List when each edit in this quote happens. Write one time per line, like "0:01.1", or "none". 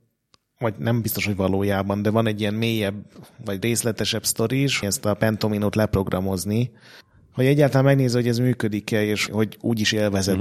0:04.8
0:09.3